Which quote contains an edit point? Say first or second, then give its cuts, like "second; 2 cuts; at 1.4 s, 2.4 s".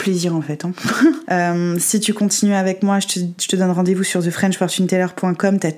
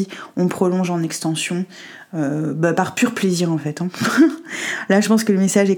first; 1 cut; at 1.2 s